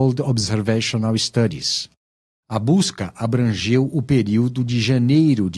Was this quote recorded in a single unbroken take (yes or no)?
no